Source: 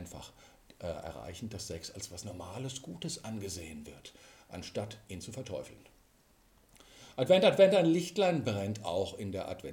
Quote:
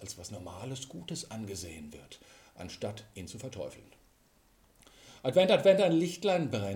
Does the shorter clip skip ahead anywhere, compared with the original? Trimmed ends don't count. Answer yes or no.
no